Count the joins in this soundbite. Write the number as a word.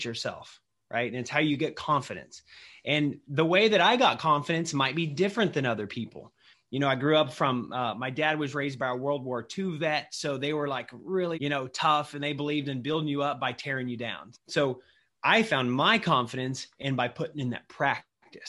two